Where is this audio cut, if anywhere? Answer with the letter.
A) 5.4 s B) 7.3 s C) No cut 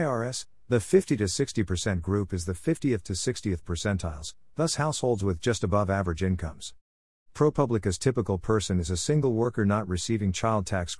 B